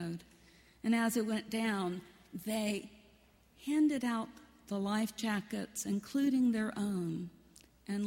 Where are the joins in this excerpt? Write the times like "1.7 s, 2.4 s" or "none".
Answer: none